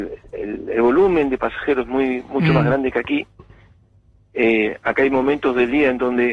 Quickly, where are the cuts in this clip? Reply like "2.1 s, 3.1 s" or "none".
none